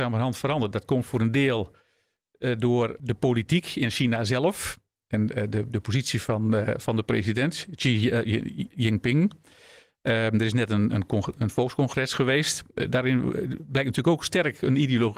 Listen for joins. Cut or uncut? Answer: uncut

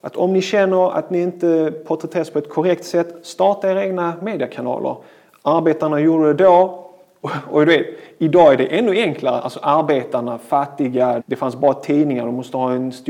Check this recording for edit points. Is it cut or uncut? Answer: cut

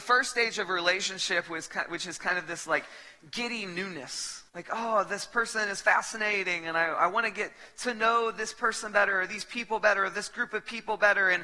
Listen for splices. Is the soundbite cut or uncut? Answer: cut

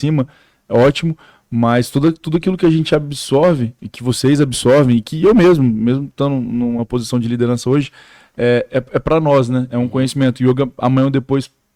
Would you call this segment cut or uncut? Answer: uncut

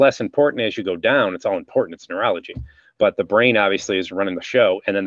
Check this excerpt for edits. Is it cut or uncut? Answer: uncut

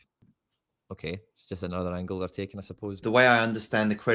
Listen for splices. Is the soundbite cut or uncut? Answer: cut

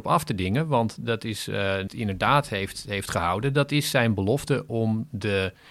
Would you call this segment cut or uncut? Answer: cut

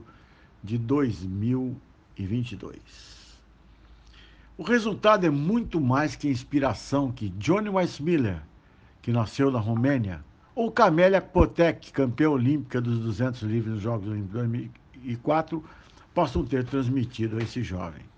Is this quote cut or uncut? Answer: cut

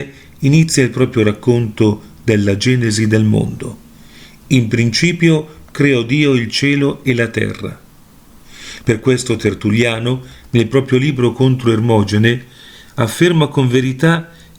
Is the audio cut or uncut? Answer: cut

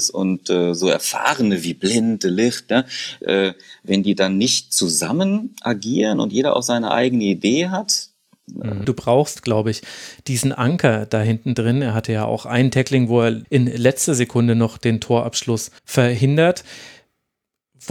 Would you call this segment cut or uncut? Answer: cut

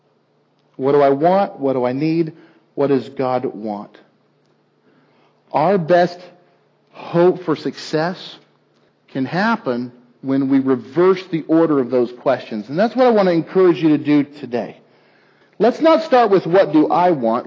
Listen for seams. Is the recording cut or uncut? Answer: cut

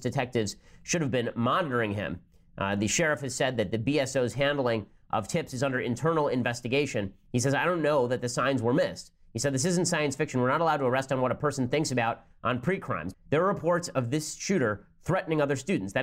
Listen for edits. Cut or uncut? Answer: cut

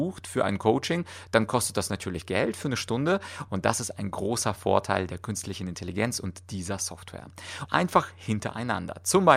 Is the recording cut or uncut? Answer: cut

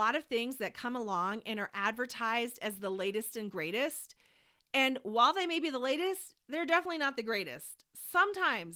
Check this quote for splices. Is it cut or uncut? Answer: uncut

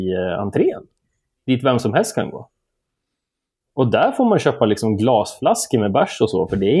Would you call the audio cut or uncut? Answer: uncut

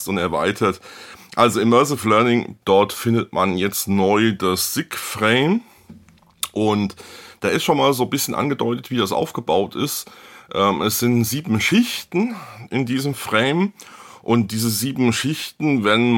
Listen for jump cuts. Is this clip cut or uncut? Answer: cut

